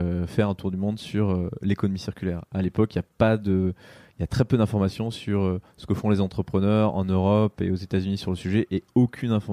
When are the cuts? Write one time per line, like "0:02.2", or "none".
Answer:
none